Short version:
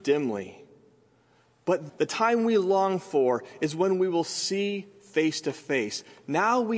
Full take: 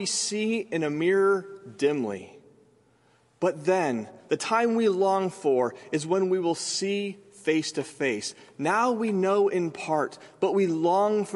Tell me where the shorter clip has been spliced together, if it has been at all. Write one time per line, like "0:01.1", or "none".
0:01.9